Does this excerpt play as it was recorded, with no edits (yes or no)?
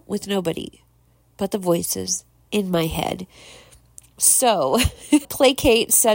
no